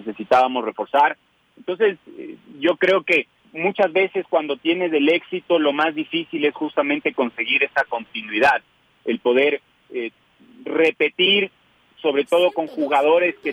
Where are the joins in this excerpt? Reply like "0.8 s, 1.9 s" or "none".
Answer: 3.4 s